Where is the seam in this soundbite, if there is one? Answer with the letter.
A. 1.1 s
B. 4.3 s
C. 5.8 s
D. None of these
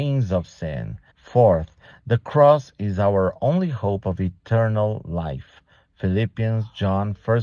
A